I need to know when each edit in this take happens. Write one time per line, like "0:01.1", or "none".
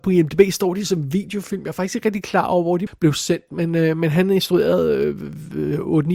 0:02.9